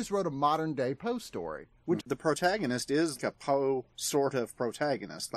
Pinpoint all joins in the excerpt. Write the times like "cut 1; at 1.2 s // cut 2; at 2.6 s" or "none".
cut 1; at 2.0 s // cut 2; at 3.2 s